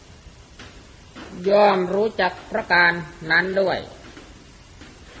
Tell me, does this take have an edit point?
no; 0 cuts

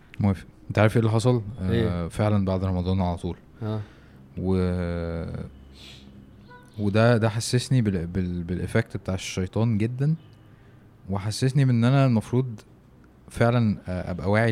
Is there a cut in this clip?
no; 0 cuts

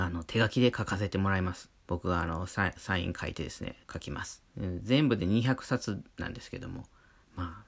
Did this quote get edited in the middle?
yes; 2 cuts; at 1.8 s, 3.8 s

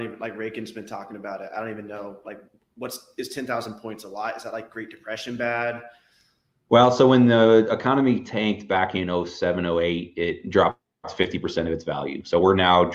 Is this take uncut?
yes; 0 cuts

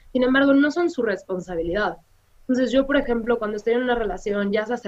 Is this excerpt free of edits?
yes; 0 cuts

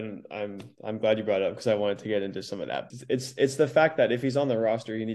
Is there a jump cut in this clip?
yes; 1 cut; at 2.9 s

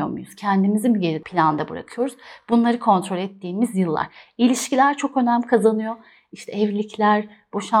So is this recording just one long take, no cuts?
yes; 0 cuts

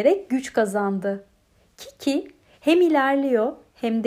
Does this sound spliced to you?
no; 0 cuts

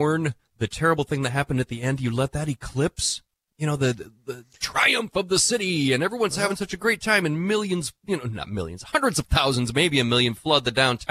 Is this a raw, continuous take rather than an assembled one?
yes; 0 cuts

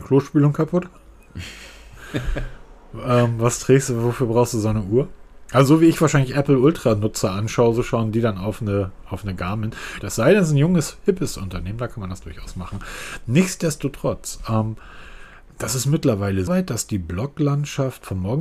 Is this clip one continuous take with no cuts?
no; 2 cuts; at 10.0 s, 16.5 s

